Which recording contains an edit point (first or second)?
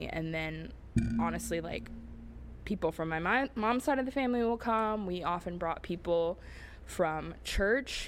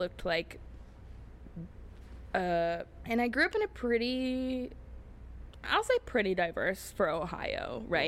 second